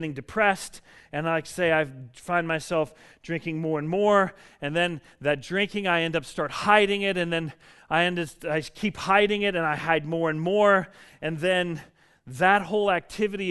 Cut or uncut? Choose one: uncut